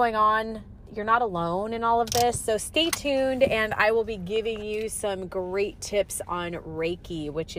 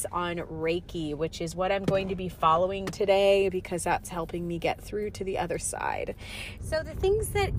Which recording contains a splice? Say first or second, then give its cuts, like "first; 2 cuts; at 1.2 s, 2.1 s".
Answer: second; 1 cut; at 6.6 s